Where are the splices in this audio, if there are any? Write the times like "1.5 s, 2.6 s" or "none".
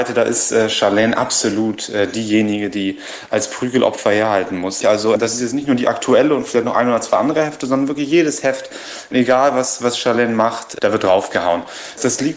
4.8 s